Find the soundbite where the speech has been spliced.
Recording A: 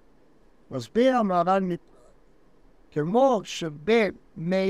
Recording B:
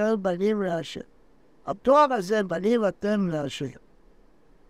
B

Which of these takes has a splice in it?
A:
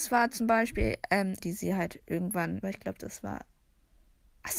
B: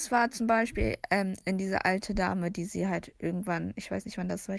A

